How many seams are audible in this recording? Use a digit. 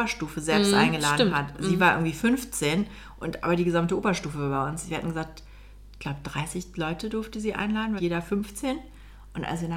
1